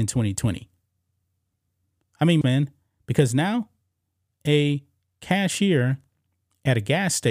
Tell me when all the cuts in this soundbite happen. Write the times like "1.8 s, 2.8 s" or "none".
2.4 s